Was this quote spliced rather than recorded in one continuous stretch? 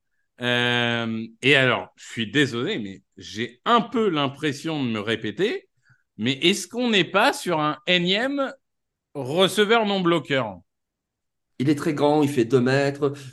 yes; 1 cut; at 11.5 s

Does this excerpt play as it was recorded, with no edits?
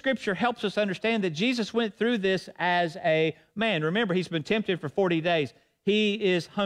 yes; 0 cuts

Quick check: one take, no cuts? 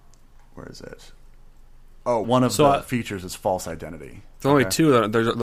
no; 2 cuts; at 2.2 s, 4.4 s

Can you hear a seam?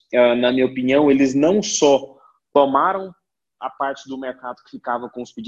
no; 0 cuts

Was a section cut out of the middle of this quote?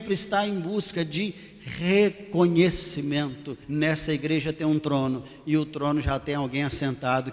yes; 1 cut; at 3.6 s

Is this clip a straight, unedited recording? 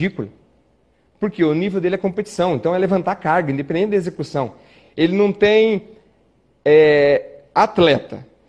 yes; 0 cuts

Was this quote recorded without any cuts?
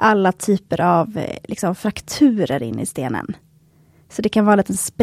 yes; 0 cuts

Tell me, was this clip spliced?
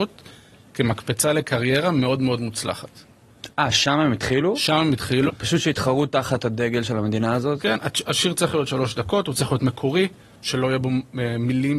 yes; 1 cut; at 5.3 s

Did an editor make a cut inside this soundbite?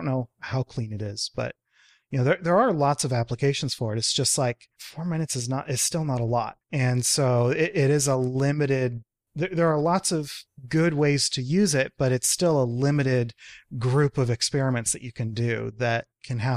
no; 0 cuts

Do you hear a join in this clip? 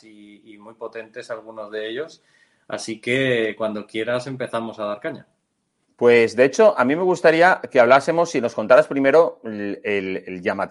no; 0 cuts

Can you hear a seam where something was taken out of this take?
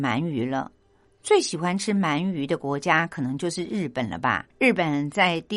yes; 1 cut; at 4.5 s

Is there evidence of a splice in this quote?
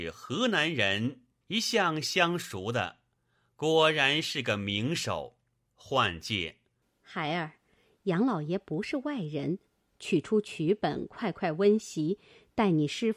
yes; 2 cuts; at 1.4 s, 5.7 s

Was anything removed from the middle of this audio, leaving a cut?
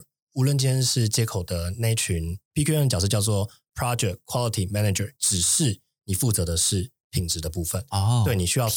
yes; 2 cuts; at 2.5 s, 5.2 s

